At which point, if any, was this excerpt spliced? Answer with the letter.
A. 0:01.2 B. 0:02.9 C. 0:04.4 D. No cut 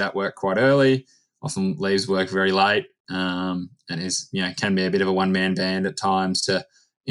D